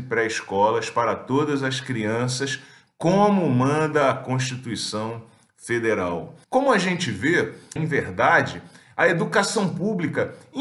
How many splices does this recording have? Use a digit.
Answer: 2